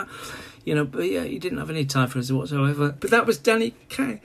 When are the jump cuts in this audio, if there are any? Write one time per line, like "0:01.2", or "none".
0:03.0